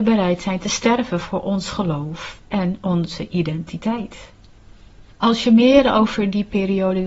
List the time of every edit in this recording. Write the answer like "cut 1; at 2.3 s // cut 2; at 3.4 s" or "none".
none

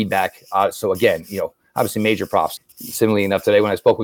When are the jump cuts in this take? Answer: cut 1; at 2.6 s

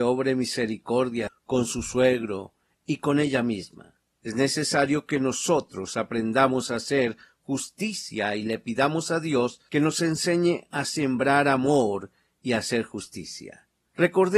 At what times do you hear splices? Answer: cut 1; at 1.3 s // cut 2; at 4.2 s

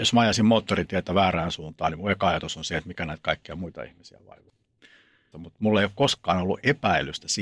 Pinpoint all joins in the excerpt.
cut 1; at 5.3 s

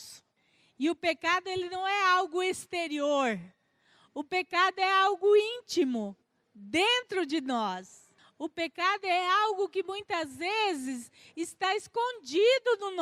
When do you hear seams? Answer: none

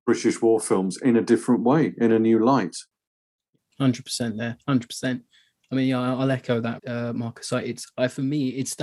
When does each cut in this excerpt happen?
cut 1; at 6.8 s

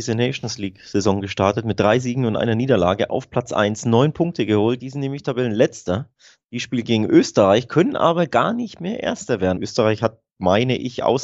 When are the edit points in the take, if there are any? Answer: cut 1; at 4.8 s // cut 2; at 9.6 s

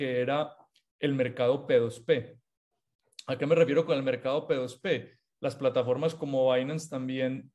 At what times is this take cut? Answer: none

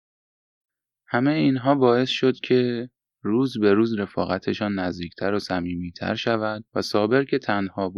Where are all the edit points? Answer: cut 1; at 6.7 s

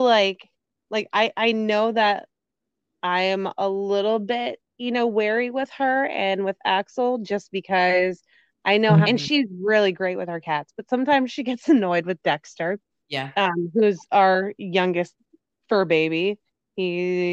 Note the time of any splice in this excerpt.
cut 1; at 9.0 s // cut 2; at 15.5 s

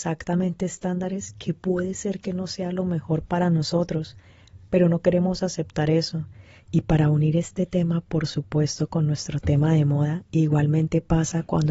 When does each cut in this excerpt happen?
cut 1; at 6.6 s

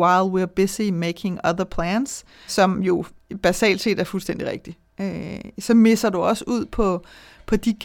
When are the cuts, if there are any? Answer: cut 1; at 2.5 s

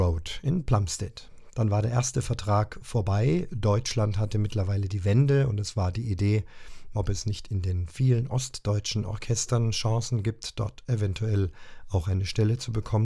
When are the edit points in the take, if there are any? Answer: cut 1; at 1.5 s // cut 2; at 6.9 s

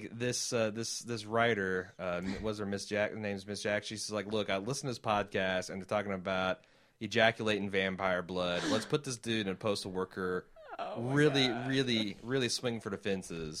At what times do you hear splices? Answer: none

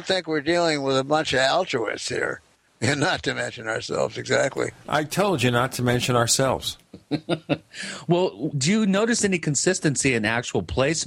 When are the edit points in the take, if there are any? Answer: cut 1; at 2.7 s // cut 2; at 8.5 s

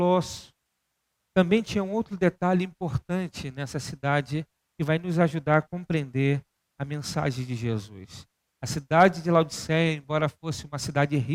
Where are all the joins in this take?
cut 1; at 1.2 s

